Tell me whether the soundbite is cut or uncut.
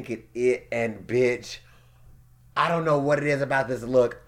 uncut